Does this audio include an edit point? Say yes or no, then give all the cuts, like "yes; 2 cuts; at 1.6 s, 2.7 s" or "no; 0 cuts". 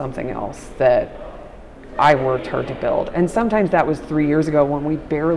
no; 0 cuts